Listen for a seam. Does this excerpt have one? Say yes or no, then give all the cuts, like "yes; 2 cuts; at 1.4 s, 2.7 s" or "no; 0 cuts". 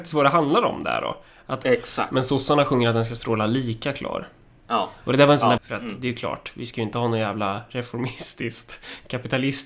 yes; 2 cuts; at 1.6 s, 5.6 s